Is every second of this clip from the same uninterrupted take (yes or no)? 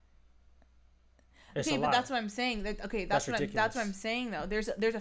yes